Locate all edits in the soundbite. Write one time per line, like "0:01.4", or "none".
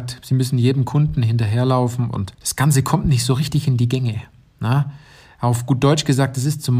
0:02.3